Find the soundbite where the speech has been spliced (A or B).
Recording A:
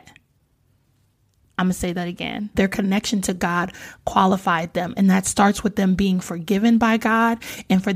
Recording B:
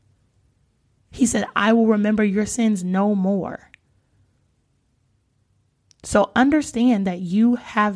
A